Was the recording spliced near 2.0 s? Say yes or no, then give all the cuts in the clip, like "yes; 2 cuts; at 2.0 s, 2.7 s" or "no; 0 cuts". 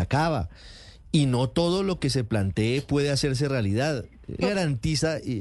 no; 1 cut; at 4.4 s